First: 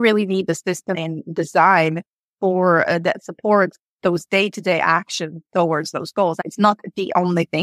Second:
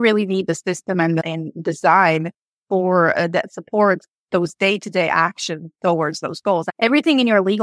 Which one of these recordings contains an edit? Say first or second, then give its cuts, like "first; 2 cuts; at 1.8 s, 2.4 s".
first; 2 cuts; at 0.9 s, 6.4 s